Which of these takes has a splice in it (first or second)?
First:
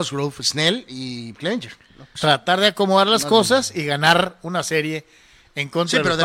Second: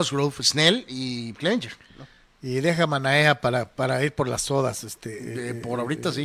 first